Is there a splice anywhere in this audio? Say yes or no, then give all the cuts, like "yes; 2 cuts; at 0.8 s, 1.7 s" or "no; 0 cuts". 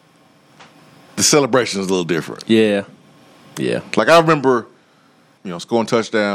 yes; 1 cut; at 5.4 s